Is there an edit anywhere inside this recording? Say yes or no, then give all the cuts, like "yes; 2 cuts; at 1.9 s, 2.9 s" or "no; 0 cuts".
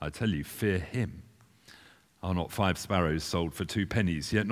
no; 0 cuts